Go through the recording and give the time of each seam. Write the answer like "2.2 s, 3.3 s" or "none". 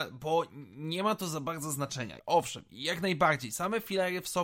2.2 s